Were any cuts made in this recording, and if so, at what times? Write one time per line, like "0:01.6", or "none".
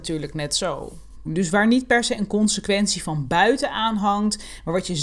0:01.3